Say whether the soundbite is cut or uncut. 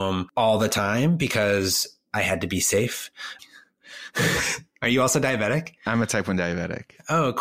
cut